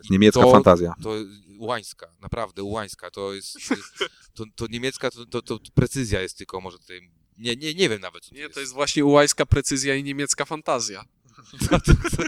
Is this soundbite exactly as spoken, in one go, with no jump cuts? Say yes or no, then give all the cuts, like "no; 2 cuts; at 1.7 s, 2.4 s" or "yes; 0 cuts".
yes; 0 cuts